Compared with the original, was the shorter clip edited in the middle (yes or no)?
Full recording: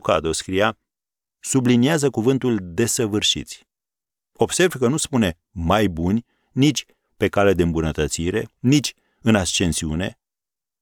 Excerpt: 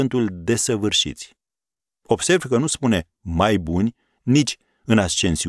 yes